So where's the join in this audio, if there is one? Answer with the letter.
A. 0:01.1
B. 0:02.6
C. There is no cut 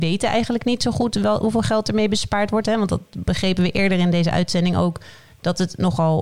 C